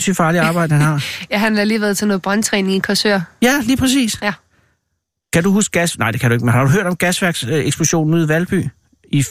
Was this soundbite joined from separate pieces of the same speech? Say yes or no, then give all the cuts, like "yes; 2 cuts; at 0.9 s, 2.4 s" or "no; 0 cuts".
no; 0 cuts